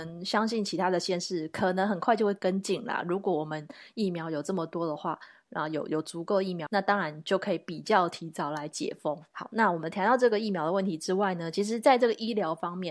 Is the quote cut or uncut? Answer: cut